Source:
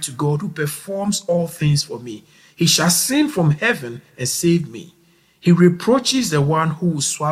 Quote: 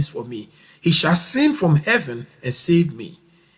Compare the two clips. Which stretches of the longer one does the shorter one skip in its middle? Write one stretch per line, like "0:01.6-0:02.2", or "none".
none